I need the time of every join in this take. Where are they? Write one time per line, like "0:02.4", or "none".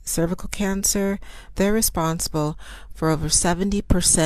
0:01.5